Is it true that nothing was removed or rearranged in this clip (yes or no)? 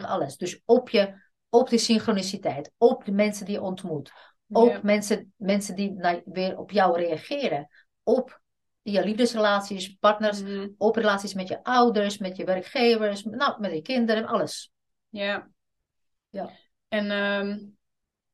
yes